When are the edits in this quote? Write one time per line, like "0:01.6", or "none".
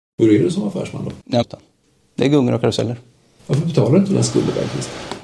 0:01.4